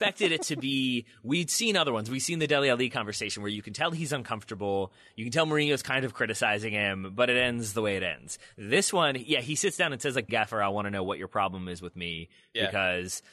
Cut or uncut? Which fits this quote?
cut